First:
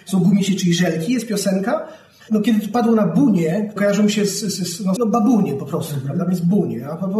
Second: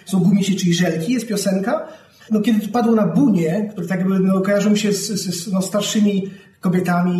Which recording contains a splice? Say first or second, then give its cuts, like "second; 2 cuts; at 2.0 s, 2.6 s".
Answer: first; 2 cuts; at 3.8 s, 5.0 s